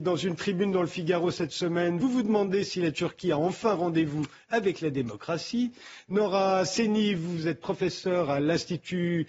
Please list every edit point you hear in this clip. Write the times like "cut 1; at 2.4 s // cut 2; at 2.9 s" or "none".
cut 1; at 2.0 s